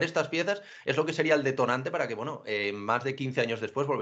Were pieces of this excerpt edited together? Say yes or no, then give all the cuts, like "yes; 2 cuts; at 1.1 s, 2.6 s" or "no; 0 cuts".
no; 0 cuts